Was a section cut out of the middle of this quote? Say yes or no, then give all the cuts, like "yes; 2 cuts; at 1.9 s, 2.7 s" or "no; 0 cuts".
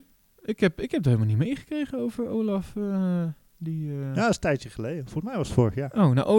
no; 0 cuts